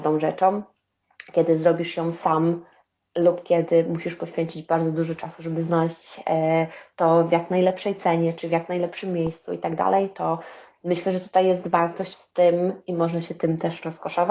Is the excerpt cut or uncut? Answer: uncut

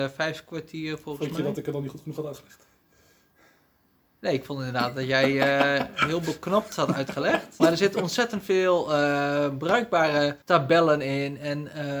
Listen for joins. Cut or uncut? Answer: cut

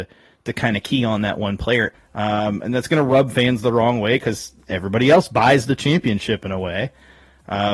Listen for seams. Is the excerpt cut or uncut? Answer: cut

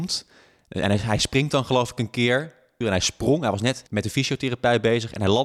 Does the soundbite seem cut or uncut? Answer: cut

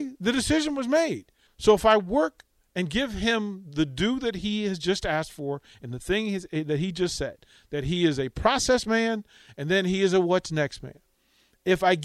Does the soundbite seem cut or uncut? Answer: cut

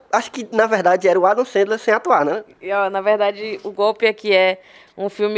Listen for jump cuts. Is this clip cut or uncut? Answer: uncut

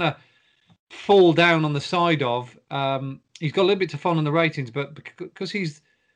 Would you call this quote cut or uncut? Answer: uncut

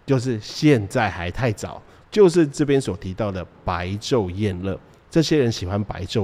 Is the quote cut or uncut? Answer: cut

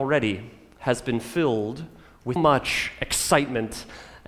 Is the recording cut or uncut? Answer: cut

